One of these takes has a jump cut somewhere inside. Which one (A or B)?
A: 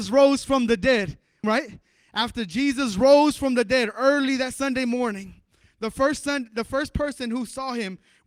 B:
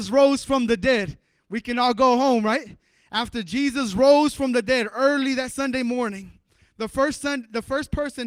A